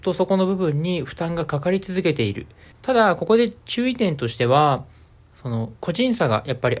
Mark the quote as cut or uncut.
cut